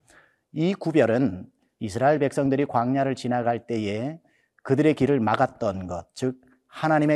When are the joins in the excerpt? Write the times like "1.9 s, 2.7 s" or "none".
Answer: none